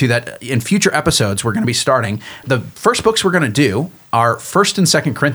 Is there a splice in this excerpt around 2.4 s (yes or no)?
yes